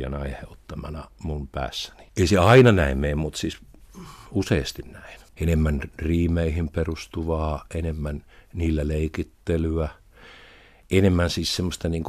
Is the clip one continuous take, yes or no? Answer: no